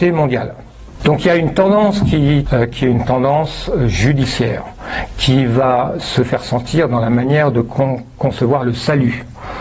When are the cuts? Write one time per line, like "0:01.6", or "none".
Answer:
0:01.0
0:02.5